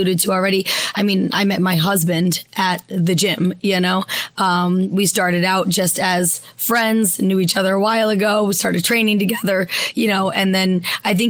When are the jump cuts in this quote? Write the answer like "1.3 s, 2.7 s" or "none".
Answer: none